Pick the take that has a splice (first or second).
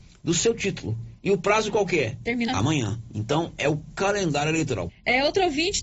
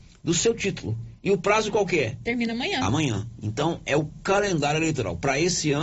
first